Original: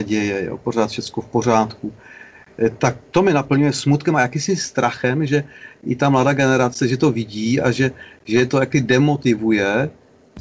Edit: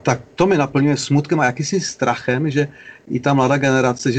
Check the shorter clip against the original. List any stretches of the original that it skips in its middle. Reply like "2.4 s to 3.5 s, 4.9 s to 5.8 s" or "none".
none